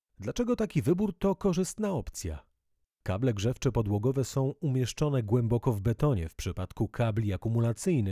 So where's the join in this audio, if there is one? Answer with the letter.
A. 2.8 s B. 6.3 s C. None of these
A